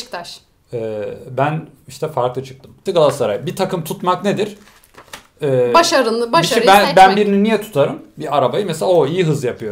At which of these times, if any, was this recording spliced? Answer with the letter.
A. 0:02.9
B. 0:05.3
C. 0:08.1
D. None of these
A